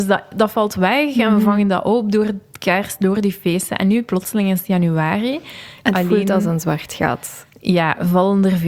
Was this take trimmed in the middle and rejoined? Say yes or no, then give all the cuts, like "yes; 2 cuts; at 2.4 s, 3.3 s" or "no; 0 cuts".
yes; 1 cut; at 5.8 s